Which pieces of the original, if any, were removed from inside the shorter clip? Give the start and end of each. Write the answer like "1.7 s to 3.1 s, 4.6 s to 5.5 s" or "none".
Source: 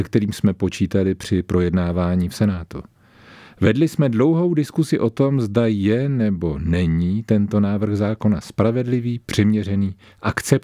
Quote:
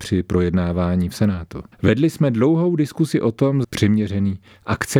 2.9 s to 3.5 s, 5.4 s to 9.2 s